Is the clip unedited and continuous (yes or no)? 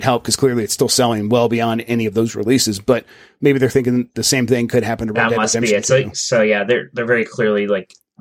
yes